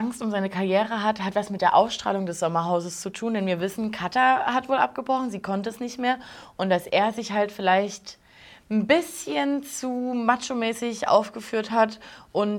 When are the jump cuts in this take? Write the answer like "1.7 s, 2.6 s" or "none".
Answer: none